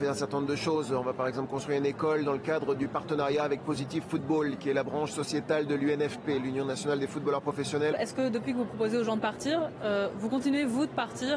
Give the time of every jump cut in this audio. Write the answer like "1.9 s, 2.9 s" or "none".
7.9 s